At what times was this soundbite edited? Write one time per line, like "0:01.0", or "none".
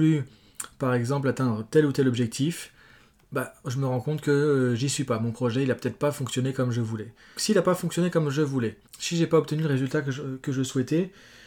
0:07.4
0:08.9